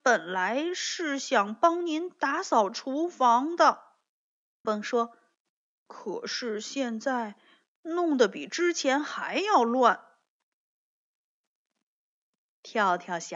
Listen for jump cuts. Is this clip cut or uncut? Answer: cut